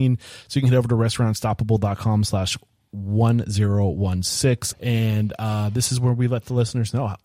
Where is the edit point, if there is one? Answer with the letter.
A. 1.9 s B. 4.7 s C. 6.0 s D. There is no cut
B